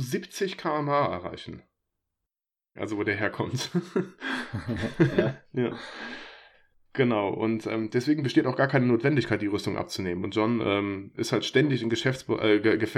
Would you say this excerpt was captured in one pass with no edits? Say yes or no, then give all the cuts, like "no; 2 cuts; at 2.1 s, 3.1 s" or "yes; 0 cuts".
no; 1 cut; at 2.8 s